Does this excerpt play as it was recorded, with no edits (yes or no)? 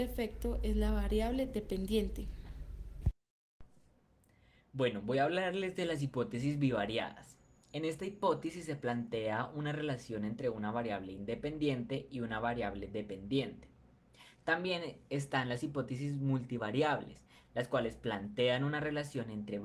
yes